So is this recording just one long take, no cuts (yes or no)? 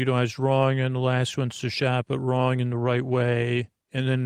yes